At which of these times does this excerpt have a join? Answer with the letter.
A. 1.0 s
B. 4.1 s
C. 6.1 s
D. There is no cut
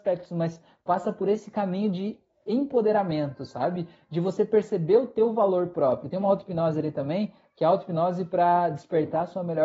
D